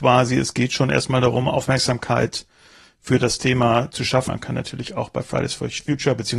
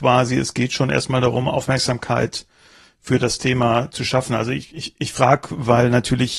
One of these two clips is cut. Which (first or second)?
first